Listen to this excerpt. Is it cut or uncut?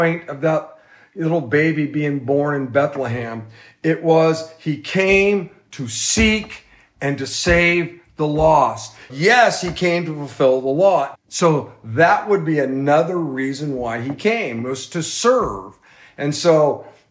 cut